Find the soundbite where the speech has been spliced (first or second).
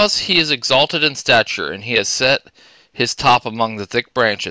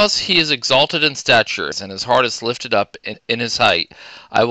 second